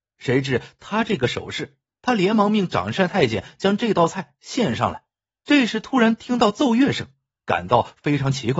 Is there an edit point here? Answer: yes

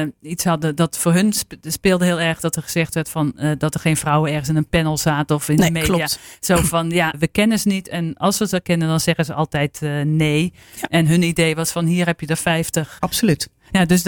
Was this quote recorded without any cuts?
no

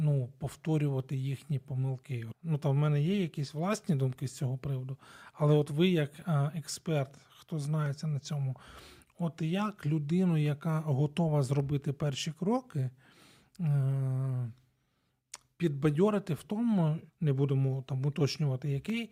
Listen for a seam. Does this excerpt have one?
yes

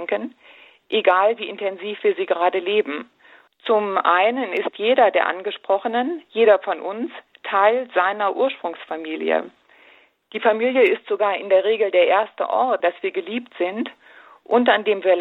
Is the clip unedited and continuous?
no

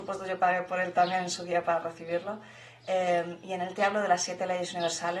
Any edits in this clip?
no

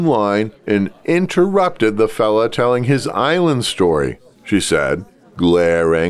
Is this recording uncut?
no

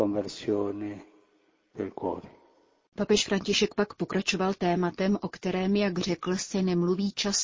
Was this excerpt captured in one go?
yes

